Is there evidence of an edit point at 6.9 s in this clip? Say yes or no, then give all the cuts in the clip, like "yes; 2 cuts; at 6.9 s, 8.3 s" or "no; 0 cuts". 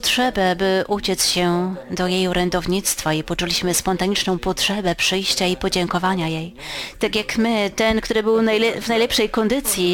yes; 1 cut; at 6.9 s